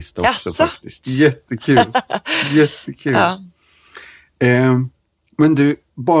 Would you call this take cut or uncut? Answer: cut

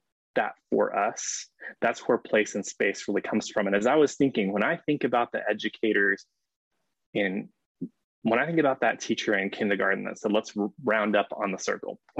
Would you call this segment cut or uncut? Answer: uncut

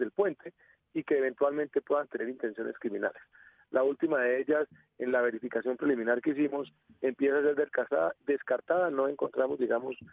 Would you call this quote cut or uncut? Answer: cut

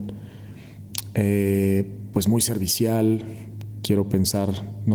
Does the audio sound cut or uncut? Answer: uncut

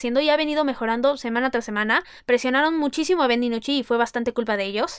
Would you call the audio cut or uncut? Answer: cut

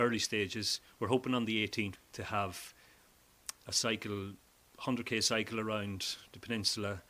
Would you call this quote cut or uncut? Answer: cut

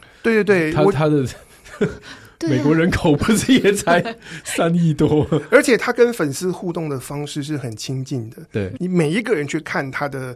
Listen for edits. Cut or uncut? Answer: uncut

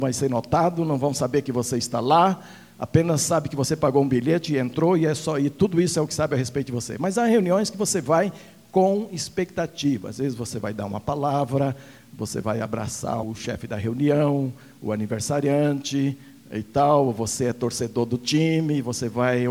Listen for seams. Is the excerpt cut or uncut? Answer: cut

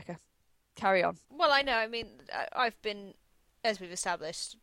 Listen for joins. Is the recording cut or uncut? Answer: cut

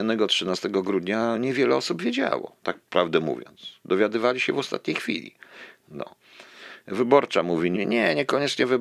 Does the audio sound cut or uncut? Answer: cut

